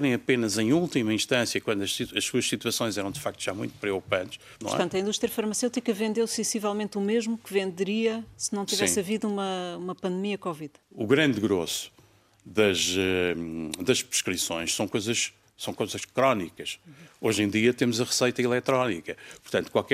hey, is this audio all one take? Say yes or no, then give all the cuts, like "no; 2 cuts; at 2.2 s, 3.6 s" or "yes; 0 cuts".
yes; 0 cuts